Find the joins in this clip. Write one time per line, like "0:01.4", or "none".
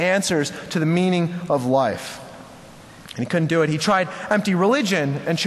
none